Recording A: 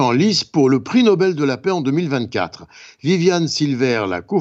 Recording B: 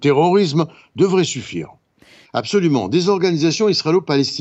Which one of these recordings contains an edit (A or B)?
B